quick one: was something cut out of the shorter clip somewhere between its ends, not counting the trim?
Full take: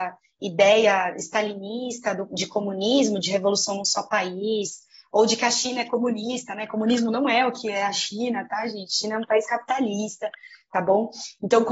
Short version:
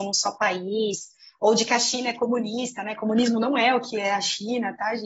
no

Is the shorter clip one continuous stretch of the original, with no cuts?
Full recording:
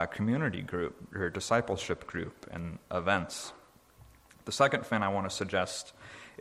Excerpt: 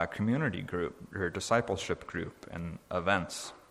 yes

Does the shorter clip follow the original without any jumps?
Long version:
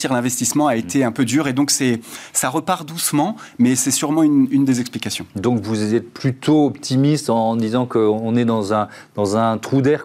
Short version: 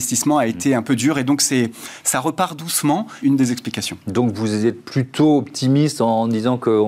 no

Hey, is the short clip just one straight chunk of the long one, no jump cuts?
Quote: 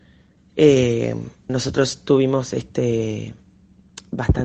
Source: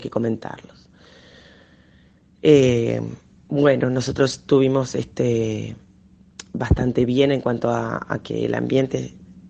no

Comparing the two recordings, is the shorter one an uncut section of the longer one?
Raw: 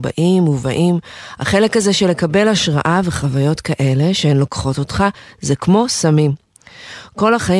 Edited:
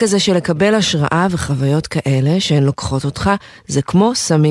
yes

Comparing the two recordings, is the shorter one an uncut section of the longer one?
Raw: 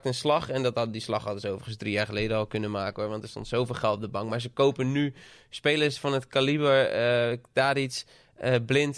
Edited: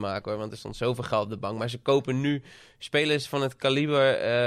yes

